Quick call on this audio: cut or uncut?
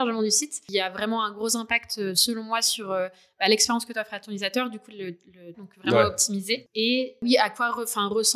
cut